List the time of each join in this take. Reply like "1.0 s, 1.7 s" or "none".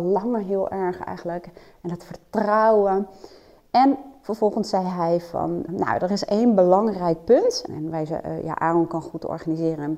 5.7 s, 7.7 s